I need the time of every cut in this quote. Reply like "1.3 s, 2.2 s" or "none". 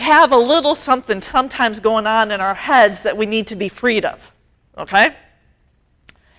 none